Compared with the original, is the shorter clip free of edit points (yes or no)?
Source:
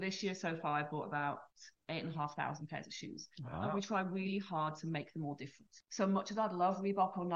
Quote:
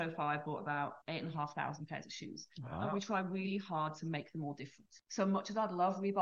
no